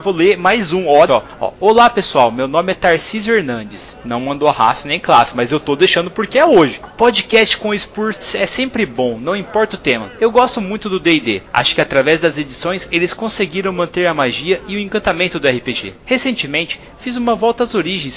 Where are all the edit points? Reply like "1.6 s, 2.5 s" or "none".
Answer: 1.1 s

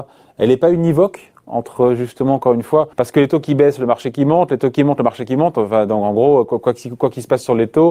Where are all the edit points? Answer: 2.9 s

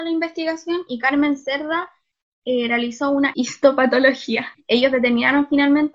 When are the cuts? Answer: none

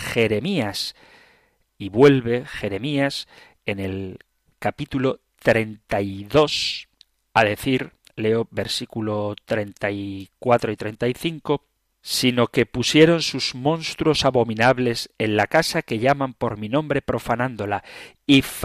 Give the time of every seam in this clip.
1.7 s

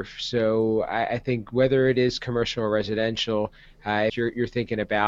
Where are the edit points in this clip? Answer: 4.1 s

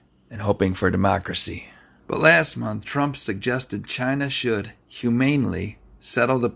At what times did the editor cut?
2.0 s

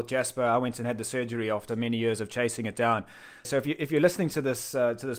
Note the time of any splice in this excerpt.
1.7 s, 3.4 s

